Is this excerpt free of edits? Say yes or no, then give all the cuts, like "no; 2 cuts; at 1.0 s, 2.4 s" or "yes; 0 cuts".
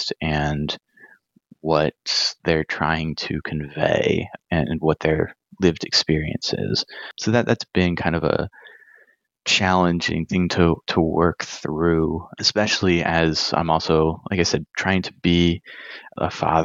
no; 1 cut; at 4.4 s